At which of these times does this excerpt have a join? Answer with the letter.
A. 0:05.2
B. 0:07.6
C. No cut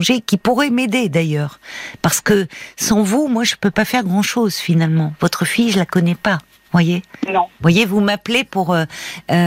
B